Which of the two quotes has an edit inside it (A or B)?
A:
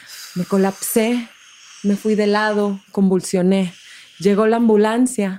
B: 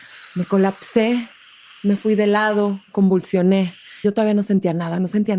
B